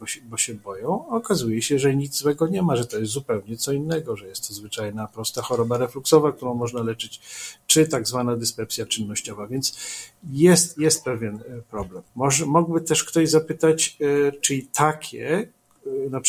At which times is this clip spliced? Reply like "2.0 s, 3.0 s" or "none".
12.1 s, 14.4 s